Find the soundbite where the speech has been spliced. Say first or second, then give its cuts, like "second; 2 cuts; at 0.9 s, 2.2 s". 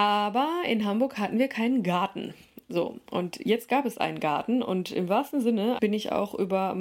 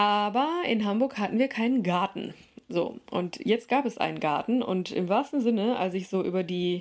first; 1 cut; at 5.8 s